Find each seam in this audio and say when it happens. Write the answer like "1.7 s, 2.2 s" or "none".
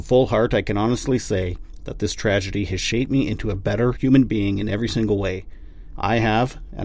4.0 s, 5.9 s